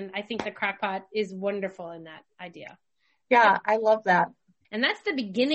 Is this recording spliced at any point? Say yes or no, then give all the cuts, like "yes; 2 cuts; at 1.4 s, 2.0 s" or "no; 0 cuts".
yes; 1 cut; at 4.6 s